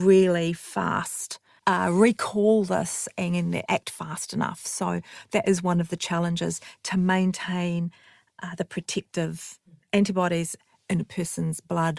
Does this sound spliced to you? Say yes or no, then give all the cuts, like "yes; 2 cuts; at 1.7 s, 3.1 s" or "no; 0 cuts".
yes; 2 cuts; at 1.6 s, 3.7 s